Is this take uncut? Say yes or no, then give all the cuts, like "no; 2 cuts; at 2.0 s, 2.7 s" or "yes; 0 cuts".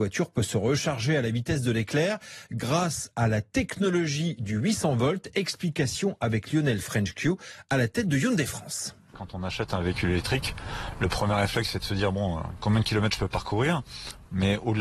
yes; 0 cuts